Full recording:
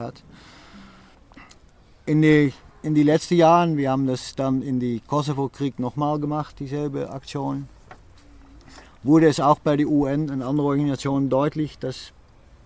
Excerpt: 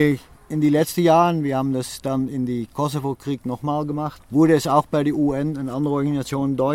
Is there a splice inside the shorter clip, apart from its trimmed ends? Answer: yes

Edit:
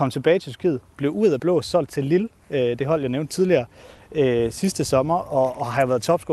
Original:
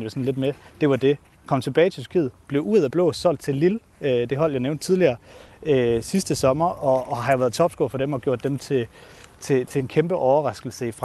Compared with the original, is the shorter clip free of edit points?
yes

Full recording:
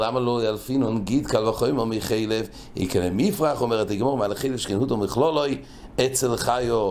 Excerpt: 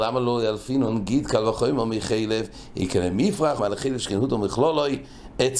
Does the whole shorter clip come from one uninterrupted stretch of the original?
no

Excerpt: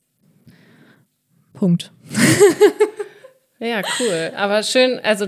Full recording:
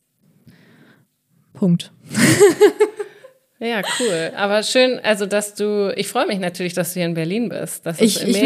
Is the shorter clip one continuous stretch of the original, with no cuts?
yes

